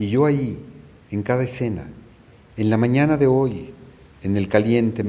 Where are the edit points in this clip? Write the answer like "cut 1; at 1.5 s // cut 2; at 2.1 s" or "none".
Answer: none

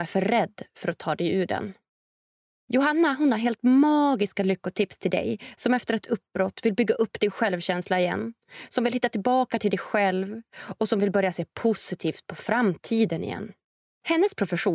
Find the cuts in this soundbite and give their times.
cut 1; at 13.8 s

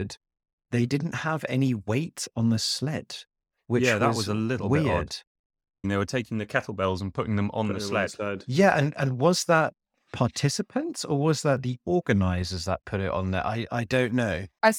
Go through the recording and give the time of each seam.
cut 1; at 5.8 s // cut 2; at 13.7 s

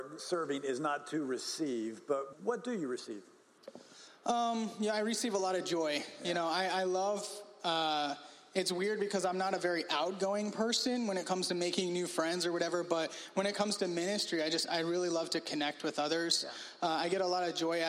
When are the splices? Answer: cut 1; at 2.3 s

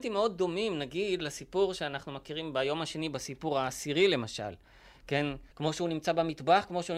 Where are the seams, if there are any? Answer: cut 1; at 5.5 s

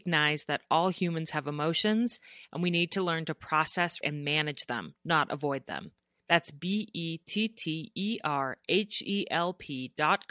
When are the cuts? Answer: cut 1; at 4.0 s // cut 2; at 6.2 s

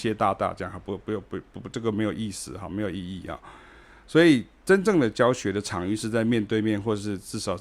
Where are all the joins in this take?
none

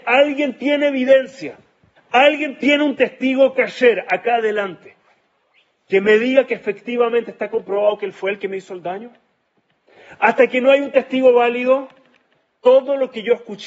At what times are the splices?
cut 1; at 2.0 s

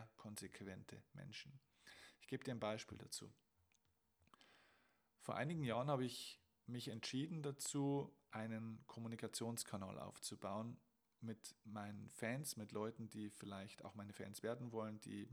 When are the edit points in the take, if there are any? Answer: none

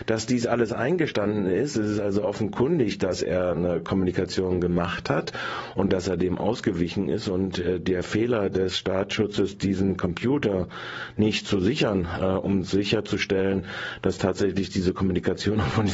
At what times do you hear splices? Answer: none

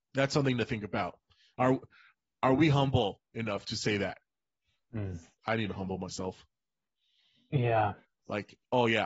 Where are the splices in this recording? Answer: cut 1; at 5.4 s // cut 2; at 8.0 s

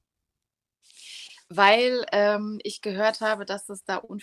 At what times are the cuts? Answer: none

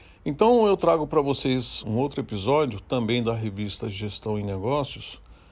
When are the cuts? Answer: cut 1; at 1.8 s

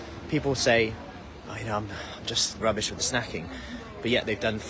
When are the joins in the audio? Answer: cut 1; at 2.6 s

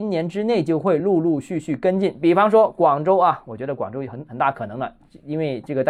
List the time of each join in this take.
none

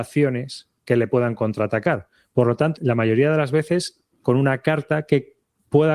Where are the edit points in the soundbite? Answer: cut 1; at 2.7 s

